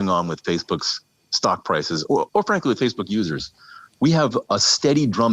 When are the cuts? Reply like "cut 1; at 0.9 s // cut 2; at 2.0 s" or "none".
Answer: none